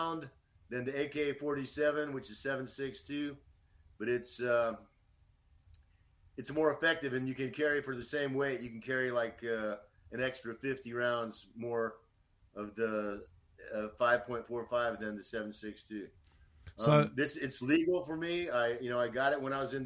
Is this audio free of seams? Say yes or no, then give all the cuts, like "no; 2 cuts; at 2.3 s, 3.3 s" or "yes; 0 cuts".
yes; 0 cuts